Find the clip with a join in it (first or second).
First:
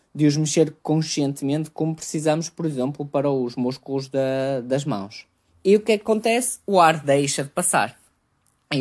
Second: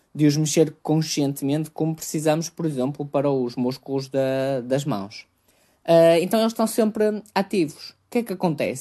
first